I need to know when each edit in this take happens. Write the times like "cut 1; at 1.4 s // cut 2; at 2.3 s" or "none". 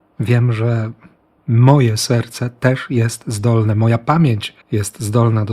cut 1; at 4.6 s